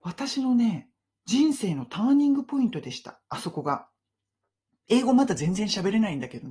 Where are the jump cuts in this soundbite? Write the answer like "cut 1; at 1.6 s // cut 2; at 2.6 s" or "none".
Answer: none